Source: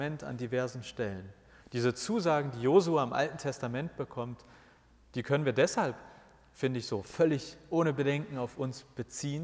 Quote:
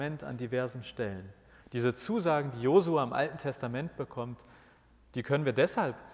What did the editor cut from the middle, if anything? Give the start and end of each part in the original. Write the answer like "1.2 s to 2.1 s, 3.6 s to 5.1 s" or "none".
none